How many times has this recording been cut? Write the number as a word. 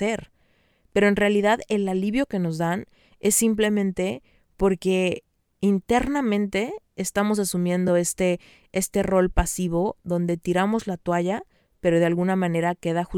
zero